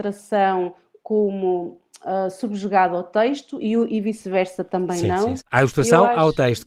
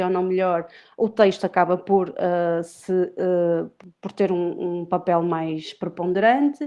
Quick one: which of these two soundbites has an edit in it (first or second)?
first